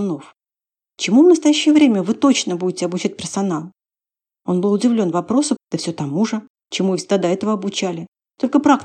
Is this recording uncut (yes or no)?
no